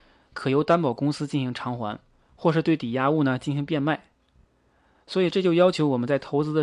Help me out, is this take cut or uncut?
uncut